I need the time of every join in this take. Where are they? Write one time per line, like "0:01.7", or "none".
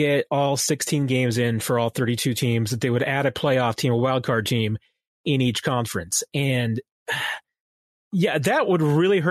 none

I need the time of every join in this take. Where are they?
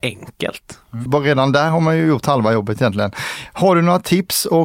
0:01.1

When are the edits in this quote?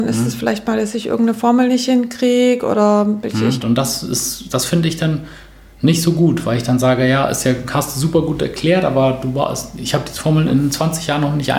0:03.6

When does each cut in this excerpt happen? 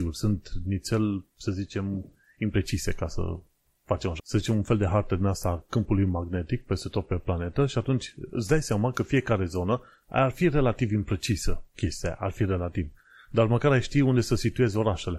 0:04.2

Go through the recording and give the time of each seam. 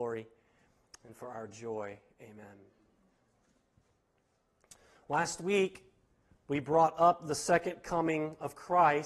none

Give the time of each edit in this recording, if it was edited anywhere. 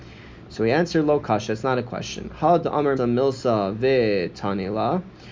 0:03.0

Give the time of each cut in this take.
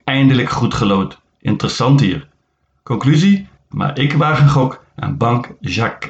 0:03.7

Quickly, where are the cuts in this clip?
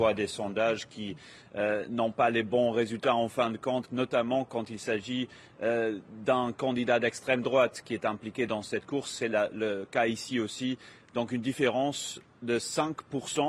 none

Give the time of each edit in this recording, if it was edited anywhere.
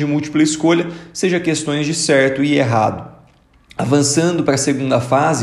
none

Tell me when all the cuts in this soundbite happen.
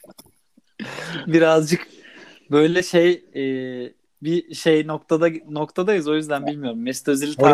0:04.0

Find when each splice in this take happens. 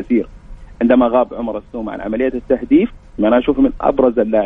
0:03.2

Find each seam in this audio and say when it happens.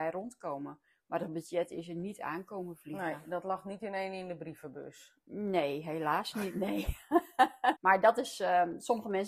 0:07.7

